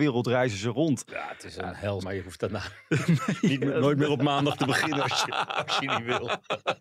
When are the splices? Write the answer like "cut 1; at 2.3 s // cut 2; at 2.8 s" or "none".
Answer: cut 1; at 2.0 s